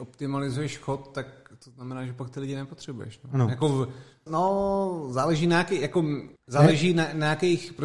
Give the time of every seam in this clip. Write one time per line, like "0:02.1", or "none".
0:04.3
0:06.4